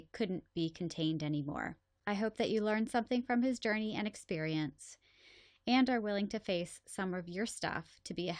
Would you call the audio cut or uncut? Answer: cut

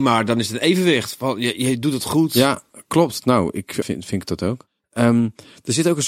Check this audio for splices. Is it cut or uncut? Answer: cut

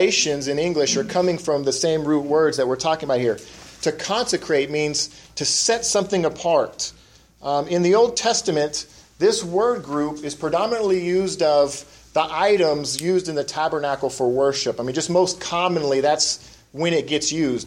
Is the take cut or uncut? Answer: uncut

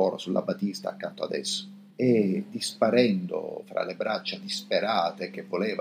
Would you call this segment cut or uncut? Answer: cut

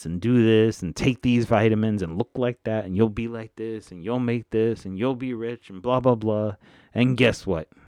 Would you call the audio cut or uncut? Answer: uncut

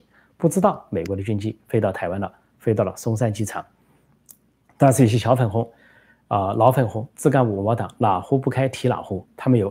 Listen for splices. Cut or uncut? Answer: uncut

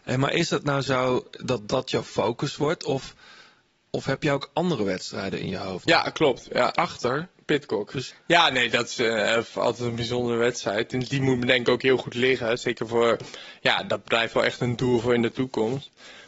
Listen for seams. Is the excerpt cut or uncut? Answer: cut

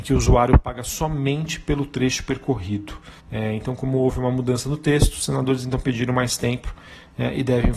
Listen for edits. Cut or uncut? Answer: cut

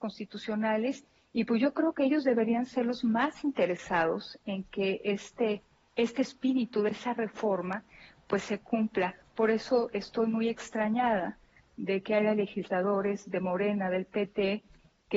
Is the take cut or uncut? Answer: uncut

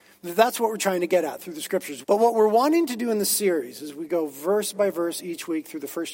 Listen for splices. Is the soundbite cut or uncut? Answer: cut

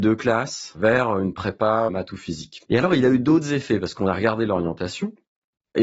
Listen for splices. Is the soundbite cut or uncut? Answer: cut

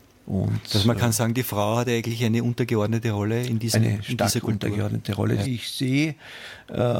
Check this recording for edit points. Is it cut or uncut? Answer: cut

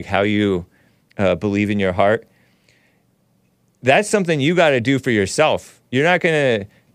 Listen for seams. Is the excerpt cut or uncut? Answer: uncut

